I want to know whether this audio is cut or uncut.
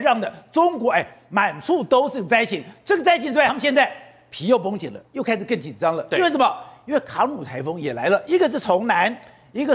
uncut